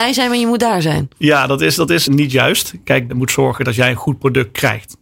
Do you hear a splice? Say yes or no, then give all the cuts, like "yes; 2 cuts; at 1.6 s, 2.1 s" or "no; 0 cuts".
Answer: yes; 2 cuts; at 2.1 s, 3.1 s